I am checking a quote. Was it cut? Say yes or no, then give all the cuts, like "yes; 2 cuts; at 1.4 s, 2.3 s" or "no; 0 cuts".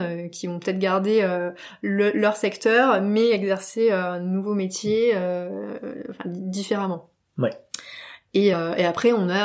no; 0 cuts